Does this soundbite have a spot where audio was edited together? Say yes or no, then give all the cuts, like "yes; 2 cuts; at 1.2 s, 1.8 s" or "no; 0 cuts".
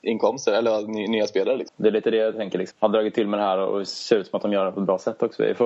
yes; 2 cuts; at 1.7 s, 2.7 s